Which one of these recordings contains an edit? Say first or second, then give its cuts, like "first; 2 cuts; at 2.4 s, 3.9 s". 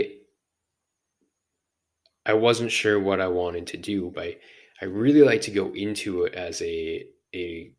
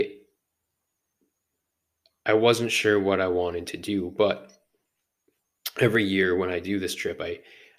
first; 1 cut; at 4.1 s